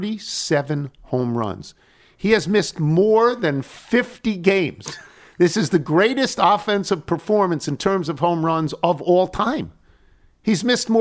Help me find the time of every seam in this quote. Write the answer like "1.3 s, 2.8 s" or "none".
none